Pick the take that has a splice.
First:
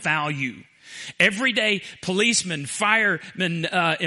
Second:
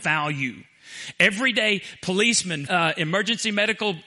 second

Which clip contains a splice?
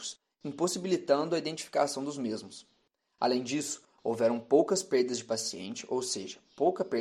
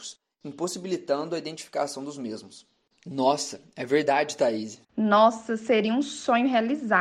second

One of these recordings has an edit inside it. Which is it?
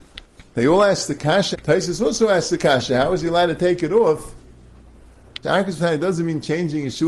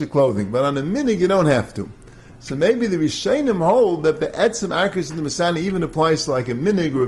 first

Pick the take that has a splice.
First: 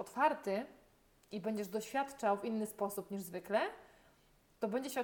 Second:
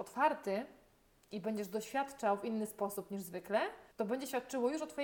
second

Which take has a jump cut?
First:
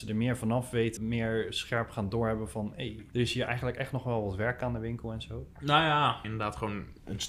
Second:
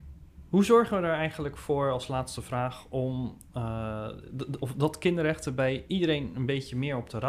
first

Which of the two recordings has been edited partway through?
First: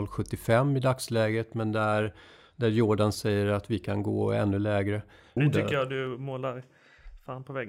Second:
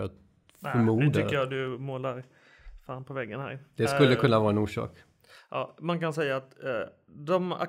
first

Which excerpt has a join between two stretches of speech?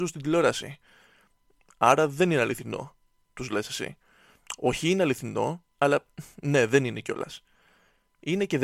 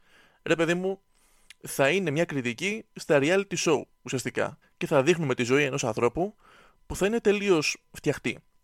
second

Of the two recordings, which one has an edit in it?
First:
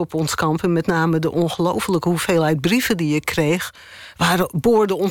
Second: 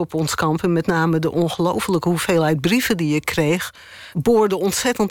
second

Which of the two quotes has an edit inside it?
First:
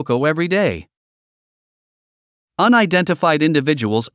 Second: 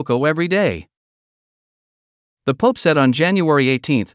second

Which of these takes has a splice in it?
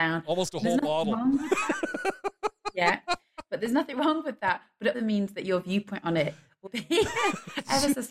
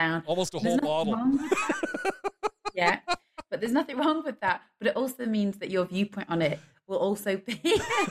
first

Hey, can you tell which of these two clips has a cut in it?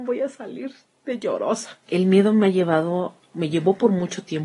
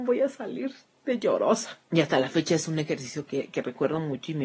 first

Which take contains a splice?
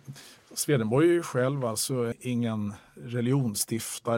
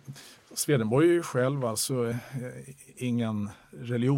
first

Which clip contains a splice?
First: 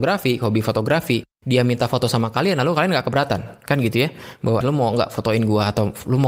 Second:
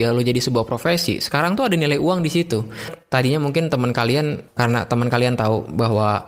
first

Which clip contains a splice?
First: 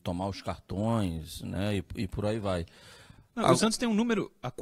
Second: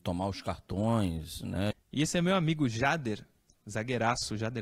second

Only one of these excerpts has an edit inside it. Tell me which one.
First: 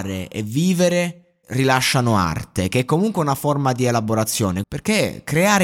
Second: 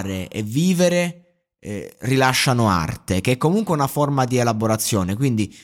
first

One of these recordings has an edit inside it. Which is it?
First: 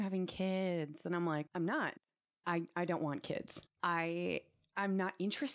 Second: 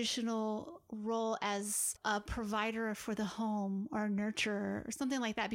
first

